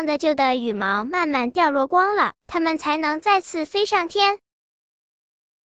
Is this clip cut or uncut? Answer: cut